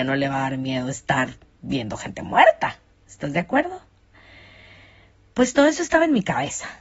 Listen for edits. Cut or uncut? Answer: uncut